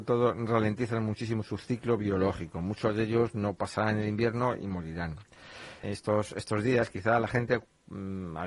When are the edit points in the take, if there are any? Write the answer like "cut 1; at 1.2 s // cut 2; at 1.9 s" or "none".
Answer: cut 1; at 5.8 s